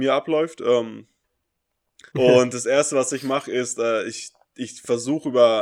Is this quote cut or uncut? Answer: cut